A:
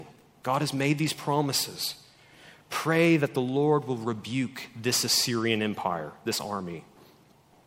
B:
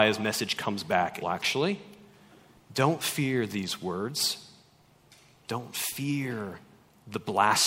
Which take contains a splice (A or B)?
B